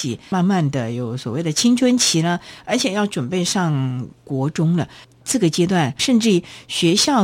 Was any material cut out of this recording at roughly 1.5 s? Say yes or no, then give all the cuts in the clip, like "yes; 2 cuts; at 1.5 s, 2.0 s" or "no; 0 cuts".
no; 1 cut; at 6.0 s